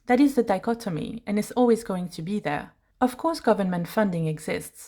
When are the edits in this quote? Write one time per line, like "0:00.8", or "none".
0:02.9